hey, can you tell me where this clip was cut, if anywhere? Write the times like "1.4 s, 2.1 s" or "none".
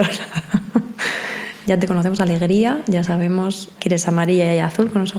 1.6 s, 3.8 s